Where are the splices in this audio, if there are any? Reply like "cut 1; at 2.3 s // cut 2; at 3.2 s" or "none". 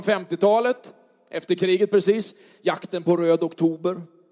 cut 1; at 2.5 s